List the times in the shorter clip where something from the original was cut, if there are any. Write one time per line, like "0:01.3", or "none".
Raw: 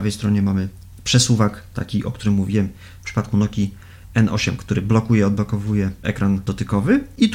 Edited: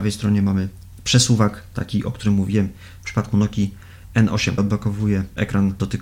0:04.6